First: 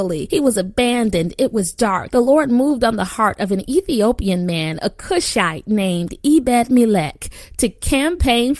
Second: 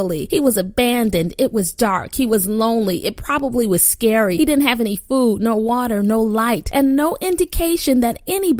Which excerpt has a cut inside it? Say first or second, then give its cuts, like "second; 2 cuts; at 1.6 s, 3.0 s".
first; 1 cut; at 2.1 s